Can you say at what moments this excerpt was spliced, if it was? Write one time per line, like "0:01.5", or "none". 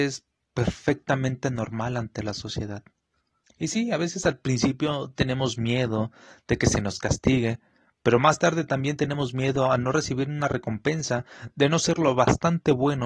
0:03.4